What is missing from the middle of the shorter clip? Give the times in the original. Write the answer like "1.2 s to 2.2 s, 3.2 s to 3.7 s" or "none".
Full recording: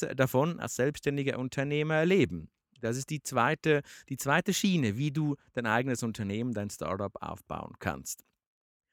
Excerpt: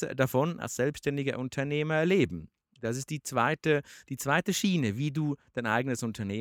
none